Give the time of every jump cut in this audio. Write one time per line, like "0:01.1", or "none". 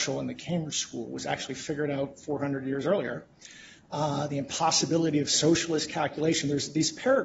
none